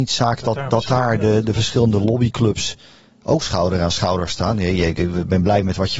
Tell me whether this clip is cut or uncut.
uncut